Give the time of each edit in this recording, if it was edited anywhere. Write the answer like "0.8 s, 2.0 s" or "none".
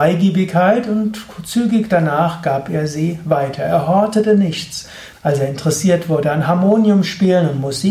5.1 s